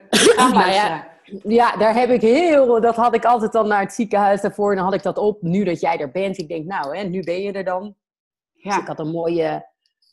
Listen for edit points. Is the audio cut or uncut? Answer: uncut